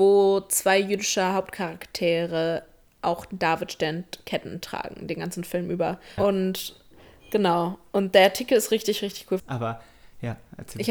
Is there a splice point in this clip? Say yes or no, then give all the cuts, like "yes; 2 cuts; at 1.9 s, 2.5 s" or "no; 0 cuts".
yes; 2 cuts; at 6.2 s, 9.4 s